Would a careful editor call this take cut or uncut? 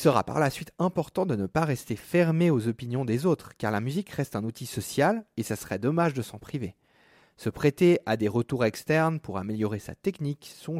uncut